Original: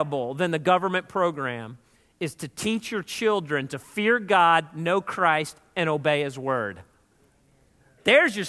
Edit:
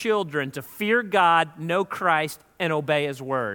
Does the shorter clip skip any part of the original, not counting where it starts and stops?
no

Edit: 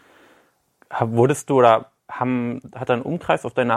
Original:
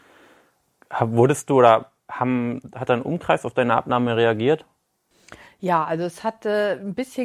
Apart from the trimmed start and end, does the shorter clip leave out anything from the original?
no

